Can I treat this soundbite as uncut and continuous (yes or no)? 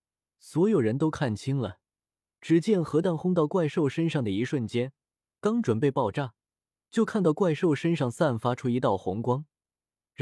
yes